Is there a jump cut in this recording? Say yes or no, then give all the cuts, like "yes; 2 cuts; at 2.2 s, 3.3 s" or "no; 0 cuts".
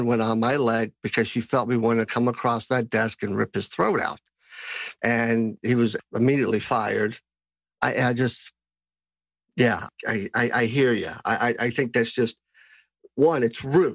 yes; 1 cut; at 5.0 s